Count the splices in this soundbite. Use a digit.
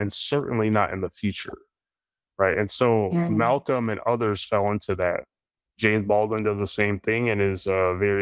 1